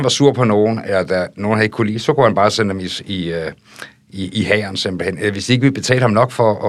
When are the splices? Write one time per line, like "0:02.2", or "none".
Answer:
none